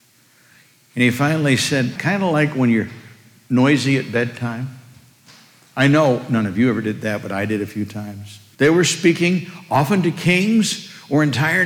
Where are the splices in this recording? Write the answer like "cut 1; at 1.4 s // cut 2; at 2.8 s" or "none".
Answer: cut 1; at 2.0 s // cut 2; at 8.5 s